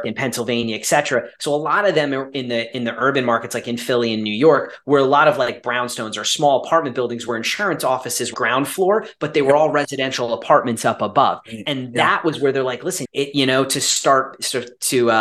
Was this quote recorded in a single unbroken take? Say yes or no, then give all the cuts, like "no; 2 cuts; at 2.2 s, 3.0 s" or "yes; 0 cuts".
no; 2 cuts; at 8.3 s, 13.0 s